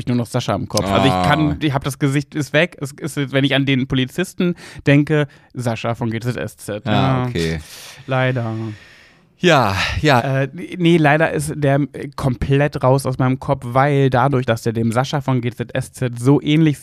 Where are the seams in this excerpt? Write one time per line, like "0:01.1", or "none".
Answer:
0:10.2
0:14.5